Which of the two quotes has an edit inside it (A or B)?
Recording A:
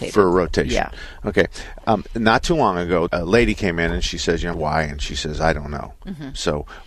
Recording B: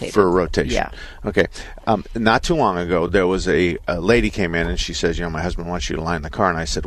A